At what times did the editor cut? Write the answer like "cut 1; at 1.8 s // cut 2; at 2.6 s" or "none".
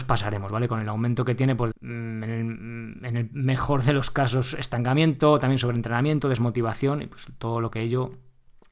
cut 1; at 1.7 s